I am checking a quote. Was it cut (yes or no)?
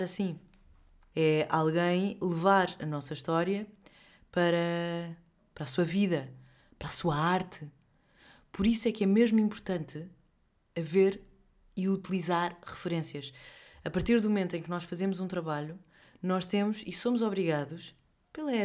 yes